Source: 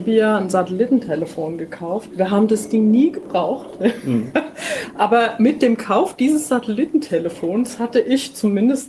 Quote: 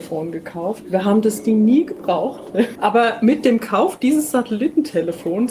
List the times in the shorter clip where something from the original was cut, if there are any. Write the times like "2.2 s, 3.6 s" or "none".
2.7 s